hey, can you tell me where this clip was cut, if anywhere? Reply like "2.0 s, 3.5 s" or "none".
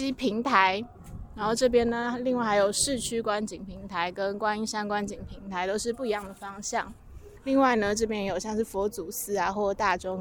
7.4 s